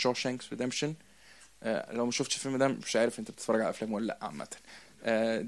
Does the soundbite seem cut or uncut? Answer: uncut